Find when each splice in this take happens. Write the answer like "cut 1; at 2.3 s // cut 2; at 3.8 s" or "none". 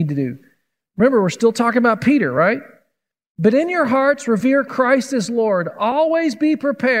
none